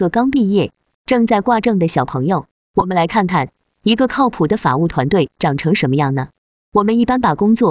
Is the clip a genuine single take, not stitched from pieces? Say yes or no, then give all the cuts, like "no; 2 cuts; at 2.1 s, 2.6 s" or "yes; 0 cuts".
no; 2 cuts; at 0.9 s, 2.7 s